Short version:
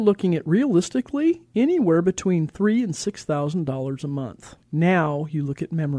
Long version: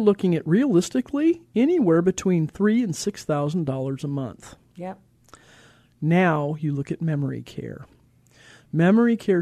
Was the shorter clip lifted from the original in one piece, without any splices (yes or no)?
no